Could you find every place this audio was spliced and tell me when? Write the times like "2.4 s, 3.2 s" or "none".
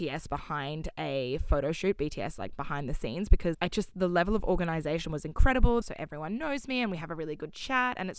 3.5 s, 5.8 s